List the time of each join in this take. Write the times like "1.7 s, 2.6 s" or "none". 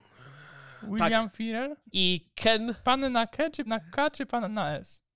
1.8 s, 3.7 s

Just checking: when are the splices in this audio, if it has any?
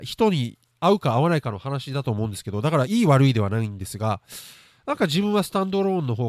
none

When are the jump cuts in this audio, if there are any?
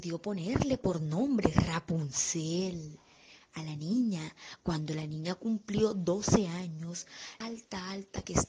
7.4 s

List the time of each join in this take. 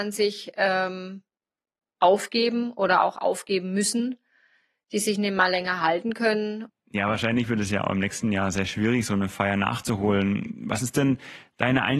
6.7 s

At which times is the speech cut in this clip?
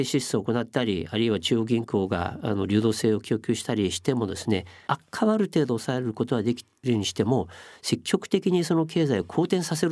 none

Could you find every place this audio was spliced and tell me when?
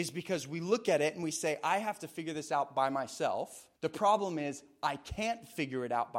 3.7 s

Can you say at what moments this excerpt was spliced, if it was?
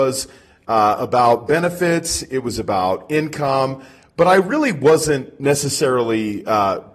none

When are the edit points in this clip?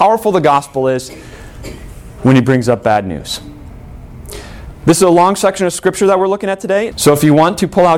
6.9 s

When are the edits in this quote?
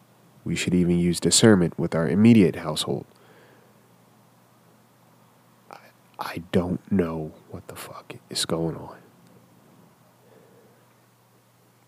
none

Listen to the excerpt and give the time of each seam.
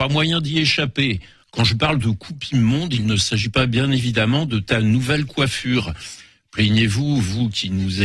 1.4 s

